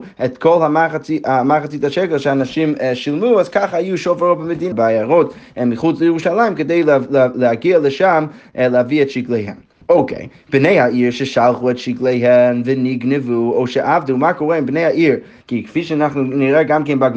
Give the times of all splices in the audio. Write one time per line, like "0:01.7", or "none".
0:04.7
0:09.8
0:15.4